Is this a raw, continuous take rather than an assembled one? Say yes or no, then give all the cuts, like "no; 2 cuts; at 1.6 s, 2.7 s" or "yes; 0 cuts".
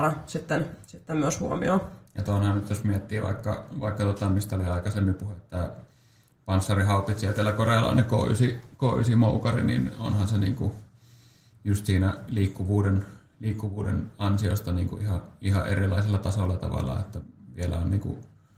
yes; 0 cuts